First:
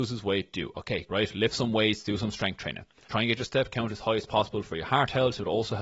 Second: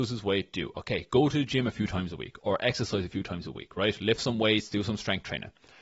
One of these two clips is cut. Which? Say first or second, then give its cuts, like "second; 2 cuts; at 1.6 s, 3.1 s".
first; 2 cuts; at 1.1 s, 3.1 s